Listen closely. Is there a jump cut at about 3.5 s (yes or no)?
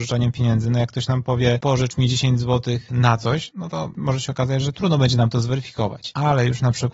no